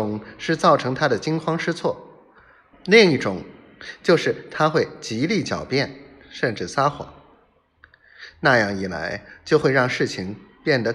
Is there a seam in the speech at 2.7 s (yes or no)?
yes